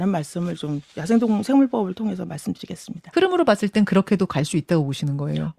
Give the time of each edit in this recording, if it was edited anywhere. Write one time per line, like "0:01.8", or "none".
0:03.1